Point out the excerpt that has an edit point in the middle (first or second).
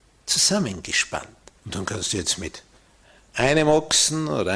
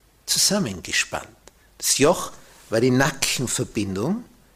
first